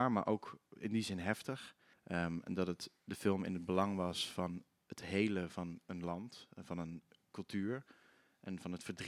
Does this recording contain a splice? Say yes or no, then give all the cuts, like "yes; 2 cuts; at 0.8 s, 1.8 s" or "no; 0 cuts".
yes; 1 cut; at 1.9 s